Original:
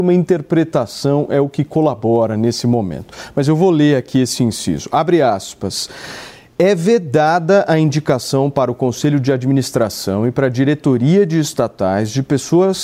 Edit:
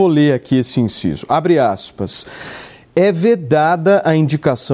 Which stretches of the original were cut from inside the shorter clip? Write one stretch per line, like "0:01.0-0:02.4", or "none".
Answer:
none